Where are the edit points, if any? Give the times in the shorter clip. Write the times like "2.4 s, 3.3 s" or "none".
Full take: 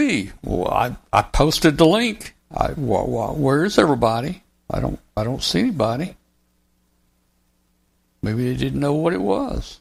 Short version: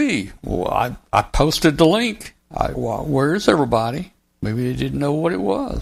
2.7 s, 4.2 s